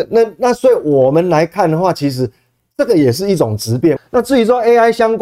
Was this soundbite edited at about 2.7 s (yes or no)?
no